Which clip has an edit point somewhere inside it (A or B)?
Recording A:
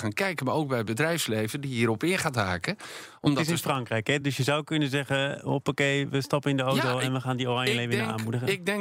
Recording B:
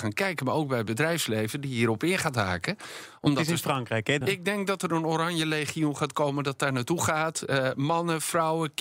B